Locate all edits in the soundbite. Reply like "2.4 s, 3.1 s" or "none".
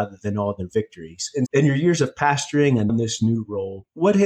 1.5 s, 2.9 s